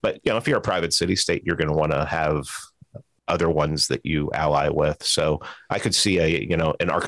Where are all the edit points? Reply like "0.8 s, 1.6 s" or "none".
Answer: none